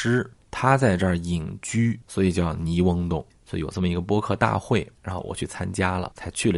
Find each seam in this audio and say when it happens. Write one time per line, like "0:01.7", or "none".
0:03.4